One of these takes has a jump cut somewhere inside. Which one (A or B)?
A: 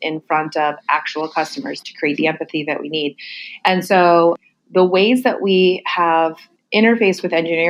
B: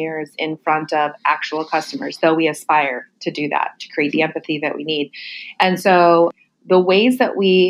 A